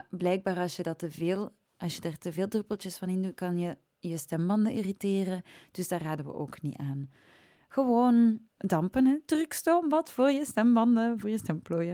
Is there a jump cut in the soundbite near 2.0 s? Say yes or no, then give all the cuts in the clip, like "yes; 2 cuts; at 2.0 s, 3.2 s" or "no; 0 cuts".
no; 1 cut; at 8.5 s